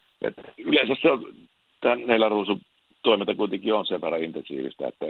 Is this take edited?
no; 0 cuts

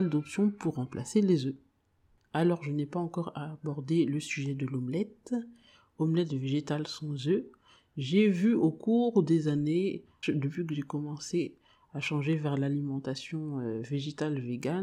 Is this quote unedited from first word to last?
no; 1 cut; at 10.2 s

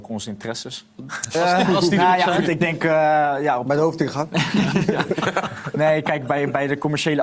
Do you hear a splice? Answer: yes; 1 cut; at 1.0 s

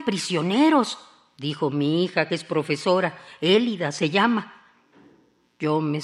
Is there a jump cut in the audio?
no; 0 cuts

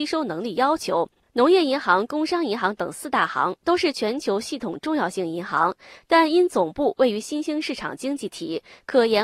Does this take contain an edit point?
no; 0 cuts

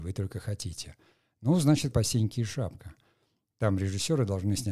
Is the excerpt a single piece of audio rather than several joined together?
no; 1 cut; at 1.9 s

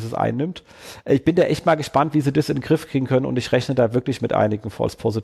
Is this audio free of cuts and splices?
yes; 0 cuts

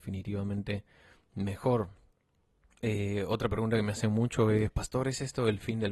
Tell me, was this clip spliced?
no; 0 cuts

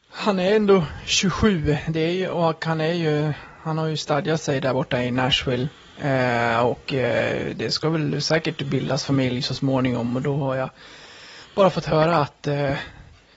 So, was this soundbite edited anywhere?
no; 0 cuts

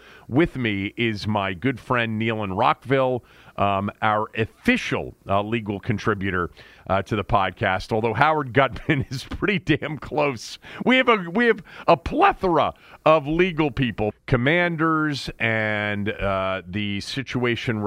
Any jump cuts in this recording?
yes; 1 cut; at 14.1 s

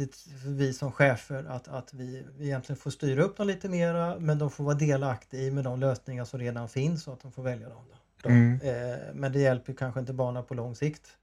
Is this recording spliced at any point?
yes; 2 cuts; at 2.3 s, 8.2 s

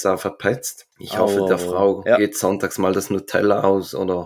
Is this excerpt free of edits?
no; 1 cut; at 0.9 s

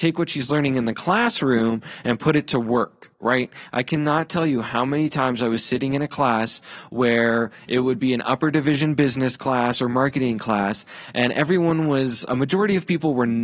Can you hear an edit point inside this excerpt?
yes; 1 cut; at 3.7 s

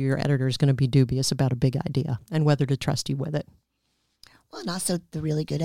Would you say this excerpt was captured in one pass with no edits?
yes; 0 cuts

